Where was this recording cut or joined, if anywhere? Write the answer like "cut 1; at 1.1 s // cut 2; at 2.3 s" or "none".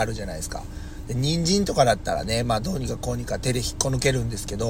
none